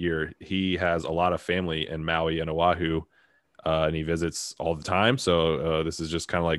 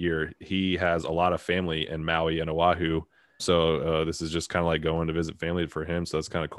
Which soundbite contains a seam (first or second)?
second